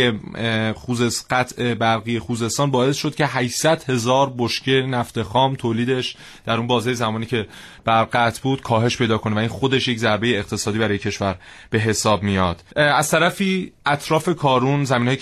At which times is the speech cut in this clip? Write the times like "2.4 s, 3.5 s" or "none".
12.7 s